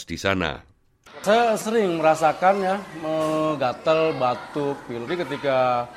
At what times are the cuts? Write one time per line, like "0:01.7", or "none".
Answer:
0:05.1